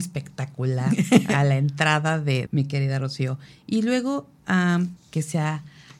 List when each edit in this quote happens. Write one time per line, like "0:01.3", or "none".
0:02.5
0:05.0